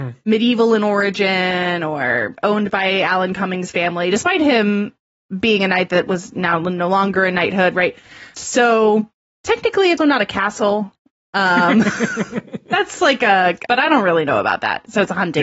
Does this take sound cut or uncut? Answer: cut